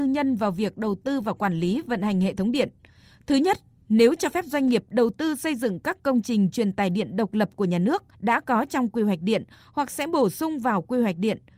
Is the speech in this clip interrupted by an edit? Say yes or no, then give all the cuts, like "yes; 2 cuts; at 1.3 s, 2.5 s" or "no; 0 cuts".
yes; 2 cuts; at 3.1 s, 8.1 s